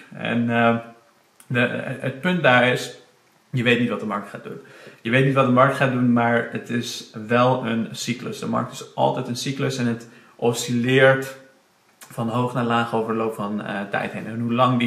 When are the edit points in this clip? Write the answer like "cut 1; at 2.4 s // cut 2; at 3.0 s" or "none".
none